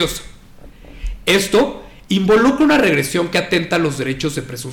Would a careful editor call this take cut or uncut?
uncut